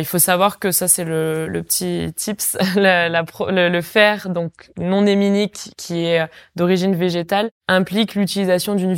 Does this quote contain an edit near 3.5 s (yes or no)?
no